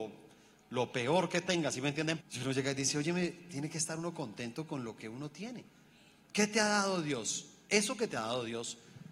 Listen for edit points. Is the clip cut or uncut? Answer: cut